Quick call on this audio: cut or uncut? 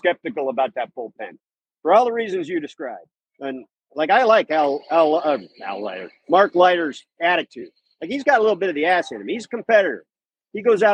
uncut